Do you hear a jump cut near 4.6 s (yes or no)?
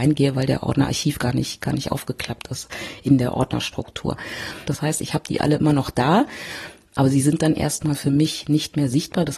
yes